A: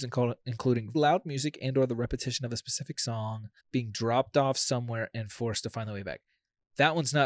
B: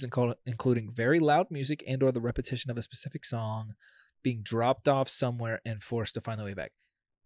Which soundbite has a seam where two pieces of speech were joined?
A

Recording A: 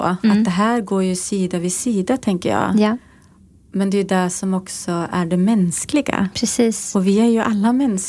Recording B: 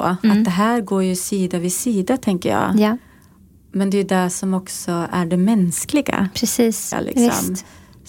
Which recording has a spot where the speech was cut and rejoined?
B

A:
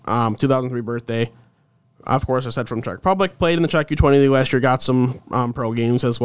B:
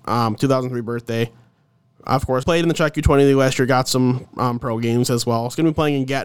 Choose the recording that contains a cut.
B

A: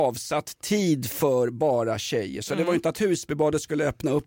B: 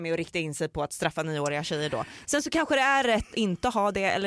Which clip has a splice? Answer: B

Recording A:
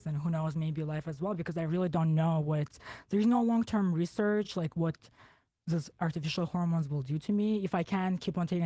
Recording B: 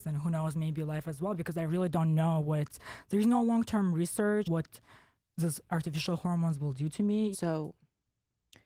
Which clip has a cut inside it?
B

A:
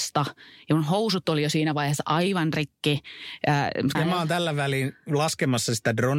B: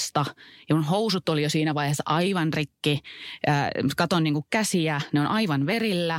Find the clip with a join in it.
A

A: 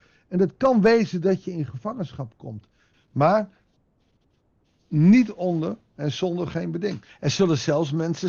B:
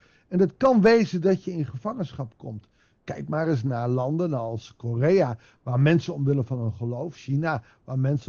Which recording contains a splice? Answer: A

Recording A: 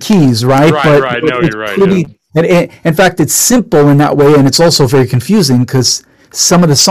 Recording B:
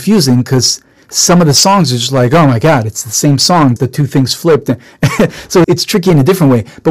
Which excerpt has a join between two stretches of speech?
B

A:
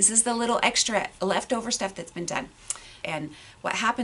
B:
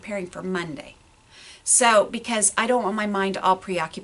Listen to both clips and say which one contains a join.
A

